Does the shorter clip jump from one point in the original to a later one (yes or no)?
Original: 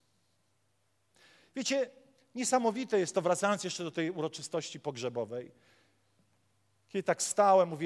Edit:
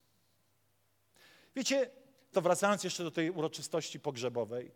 yes